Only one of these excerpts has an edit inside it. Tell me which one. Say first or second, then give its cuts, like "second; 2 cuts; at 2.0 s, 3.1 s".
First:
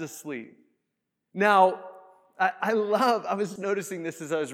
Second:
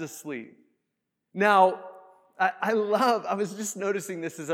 first; 1 cut; at 3.6 s